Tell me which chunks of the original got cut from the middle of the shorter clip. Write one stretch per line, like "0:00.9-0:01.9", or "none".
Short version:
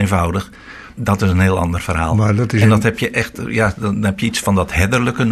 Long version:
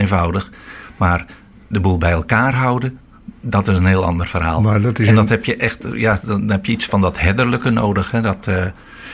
0:00.9-0:03.4